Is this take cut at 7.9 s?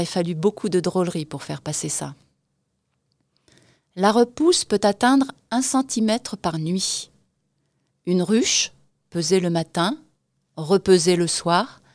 yes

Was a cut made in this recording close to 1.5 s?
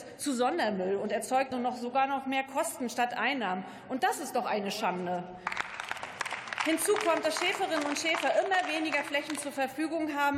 yes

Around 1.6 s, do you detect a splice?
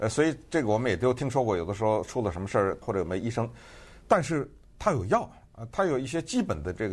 no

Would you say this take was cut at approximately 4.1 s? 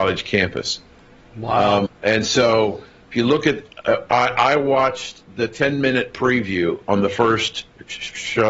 no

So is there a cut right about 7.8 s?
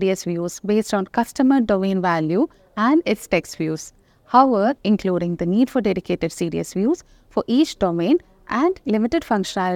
no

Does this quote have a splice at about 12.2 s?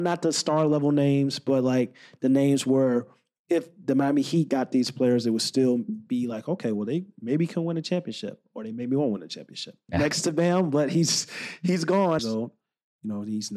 yes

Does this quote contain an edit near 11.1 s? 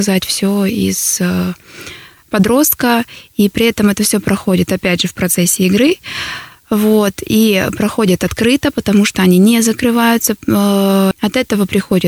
yes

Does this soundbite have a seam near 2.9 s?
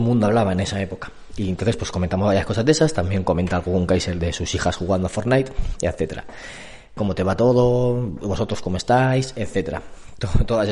no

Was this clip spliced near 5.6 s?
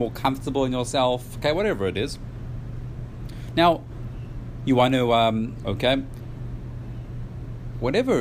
yes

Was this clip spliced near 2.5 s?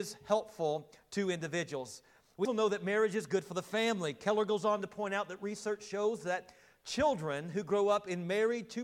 yes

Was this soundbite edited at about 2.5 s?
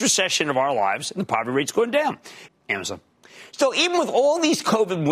yes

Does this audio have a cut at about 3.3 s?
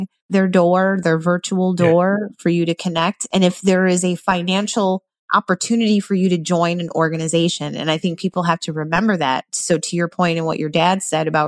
no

